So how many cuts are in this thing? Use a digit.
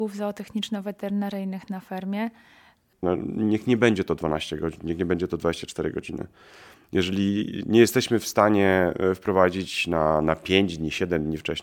1